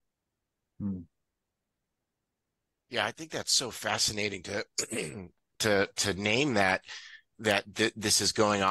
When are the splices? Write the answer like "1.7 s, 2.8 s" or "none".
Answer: none